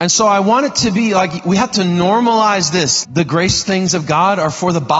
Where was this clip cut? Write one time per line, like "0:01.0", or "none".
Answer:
0:03.0

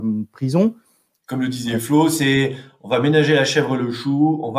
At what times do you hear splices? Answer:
0:01.2

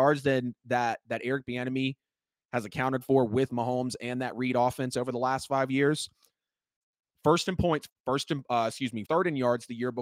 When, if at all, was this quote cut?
0:07.9
0:09.0

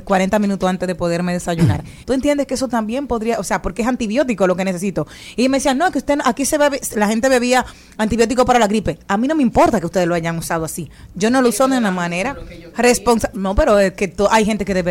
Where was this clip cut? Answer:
0:02.0
0:12.7

